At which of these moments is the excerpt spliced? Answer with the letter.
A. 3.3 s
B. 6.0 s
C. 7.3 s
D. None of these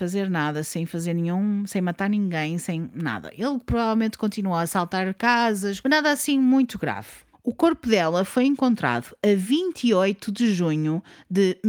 C